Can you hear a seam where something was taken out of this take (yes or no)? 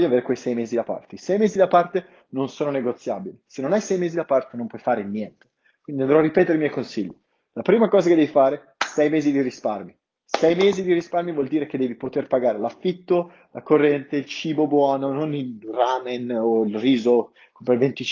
no